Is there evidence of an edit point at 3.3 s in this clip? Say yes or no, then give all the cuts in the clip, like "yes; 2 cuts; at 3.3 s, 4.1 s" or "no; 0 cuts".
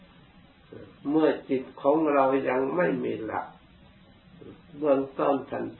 no; 1 cut; at 1.0 s